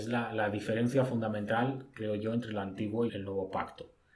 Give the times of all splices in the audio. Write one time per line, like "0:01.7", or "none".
0:03.1